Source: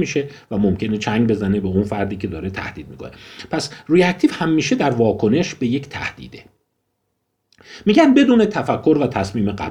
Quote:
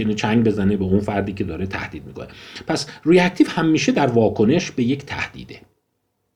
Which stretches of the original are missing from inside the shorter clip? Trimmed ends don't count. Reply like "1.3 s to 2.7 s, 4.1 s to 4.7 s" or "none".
none

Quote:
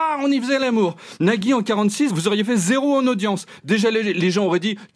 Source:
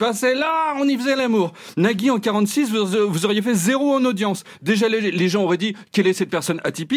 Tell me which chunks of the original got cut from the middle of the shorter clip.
2.7 s to 3.1 s

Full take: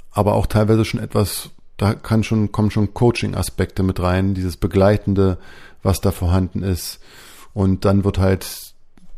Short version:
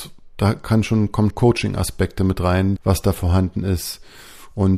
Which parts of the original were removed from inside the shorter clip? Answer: 2.7 s to 2.9 s, 4.4 s to 5.8 s

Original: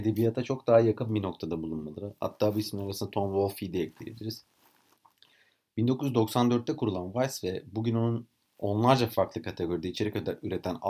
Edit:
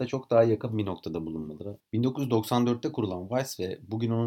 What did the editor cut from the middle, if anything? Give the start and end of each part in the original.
2.2 s to 5.6 s

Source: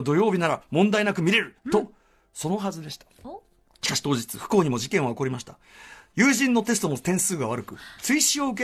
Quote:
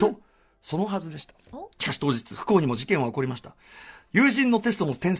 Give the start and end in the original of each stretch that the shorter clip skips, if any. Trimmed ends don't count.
3.4 s to 3.8 s

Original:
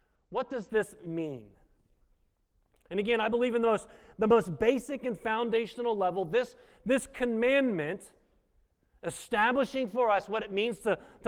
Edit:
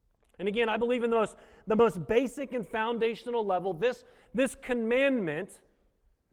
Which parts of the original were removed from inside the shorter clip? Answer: none

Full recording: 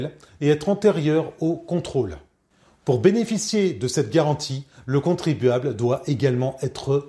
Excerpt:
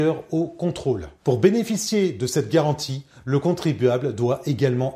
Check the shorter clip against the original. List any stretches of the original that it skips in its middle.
2.3 s to 2.8 s

